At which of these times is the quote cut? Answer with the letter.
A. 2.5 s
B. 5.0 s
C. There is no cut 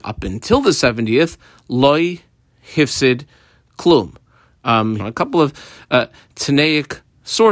B